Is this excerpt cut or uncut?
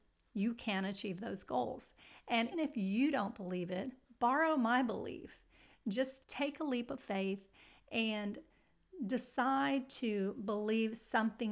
cut